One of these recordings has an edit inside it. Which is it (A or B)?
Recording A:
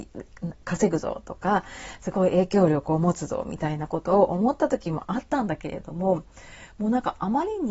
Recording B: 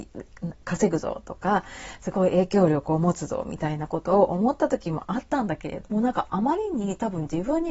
B